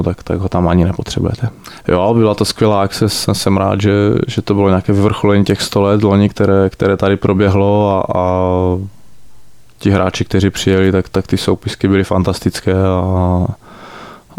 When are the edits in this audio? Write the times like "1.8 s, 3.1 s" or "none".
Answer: 1.8 s